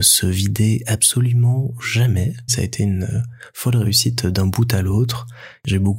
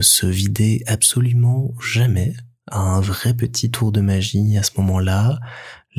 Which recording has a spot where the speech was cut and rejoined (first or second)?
first